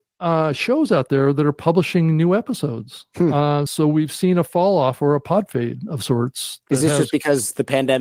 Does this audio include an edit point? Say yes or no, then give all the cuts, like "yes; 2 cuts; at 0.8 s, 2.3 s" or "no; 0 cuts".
no; 0 cuts